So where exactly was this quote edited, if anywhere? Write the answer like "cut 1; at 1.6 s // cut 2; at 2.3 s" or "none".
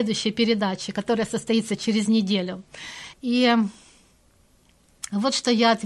cut 1; at 3.1 s